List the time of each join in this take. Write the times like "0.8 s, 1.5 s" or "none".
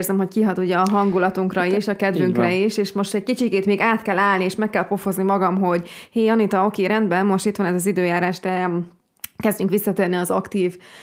none